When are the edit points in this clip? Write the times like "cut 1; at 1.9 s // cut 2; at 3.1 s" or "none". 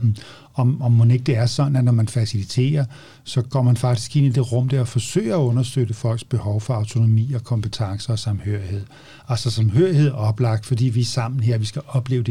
none